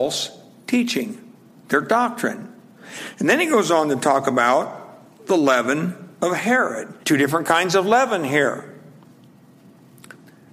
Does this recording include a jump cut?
yes; 1 cut; at 7.0 s

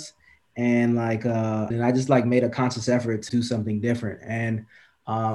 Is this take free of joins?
no; 2 cuts; at 1.7 s, 3.3 s

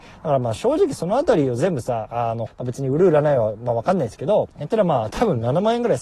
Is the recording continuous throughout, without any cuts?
no; 2 cuts; at 2.5 s, 4.5 s

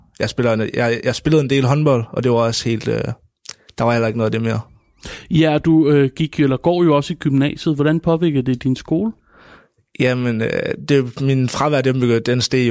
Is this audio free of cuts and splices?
yes; 0 cuts

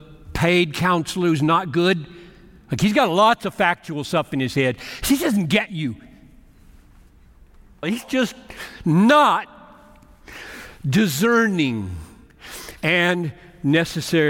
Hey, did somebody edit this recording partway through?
yes; 1 cut; at 7.8 s

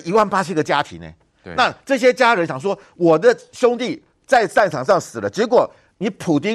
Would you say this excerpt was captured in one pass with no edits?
yes; 0 cuts

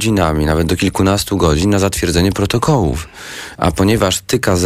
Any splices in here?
no; 0 cuts

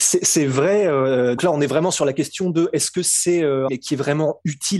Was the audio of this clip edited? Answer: yes; 2 cuts; at 1.4 s, 3.7 s

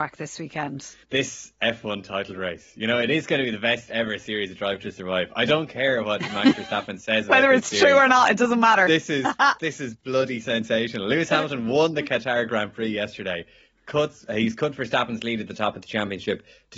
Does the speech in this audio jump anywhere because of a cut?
yes; 1 cut; at 1.0 s

